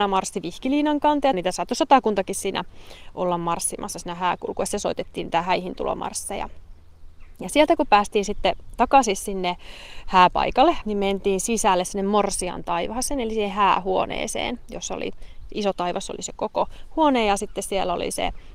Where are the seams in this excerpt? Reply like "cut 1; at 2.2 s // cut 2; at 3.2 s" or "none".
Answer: cut 1; at 1.3 s // cut 2; at 10.8 s